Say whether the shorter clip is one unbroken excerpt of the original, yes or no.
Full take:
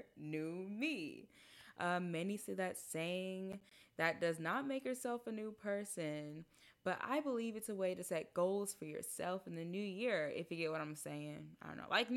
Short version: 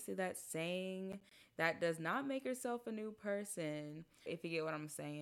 no